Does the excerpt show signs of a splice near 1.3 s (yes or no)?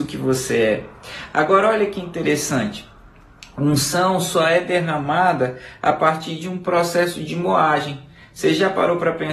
no